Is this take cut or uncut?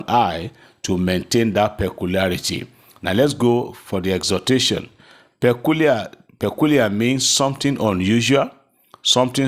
uncut